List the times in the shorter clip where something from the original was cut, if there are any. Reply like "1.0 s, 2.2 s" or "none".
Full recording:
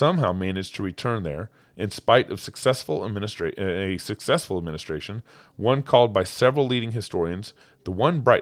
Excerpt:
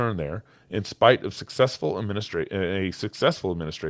none